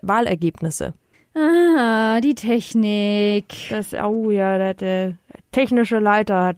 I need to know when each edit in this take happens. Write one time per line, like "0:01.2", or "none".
none